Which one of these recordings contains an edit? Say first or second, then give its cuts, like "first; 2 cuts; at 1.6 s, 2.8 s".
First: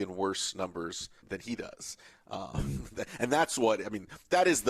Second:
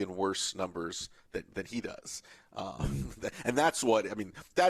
first; 1 cut; at 1.2 s